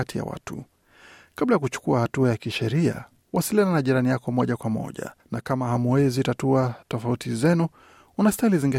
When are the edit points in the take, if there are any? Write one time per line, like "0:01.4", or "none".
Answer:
0:05.2
0:06.8